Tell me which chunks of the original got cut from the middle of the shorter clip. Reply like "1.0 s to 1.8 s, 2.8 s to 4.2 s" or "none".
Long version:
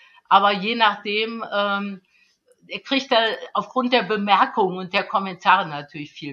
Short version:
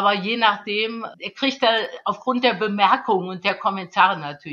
1.5 s to 2.6 s